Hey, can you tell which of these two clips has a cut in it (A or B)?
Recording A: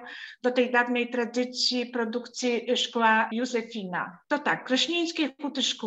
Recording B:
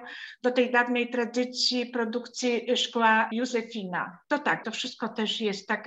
B